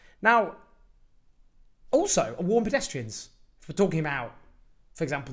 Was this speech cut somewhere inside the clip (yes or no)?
no